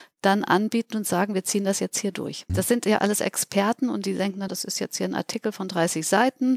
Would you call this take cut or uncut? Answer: cut